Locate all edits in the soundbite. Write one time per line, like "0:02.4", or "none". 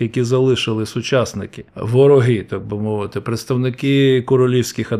0:01.7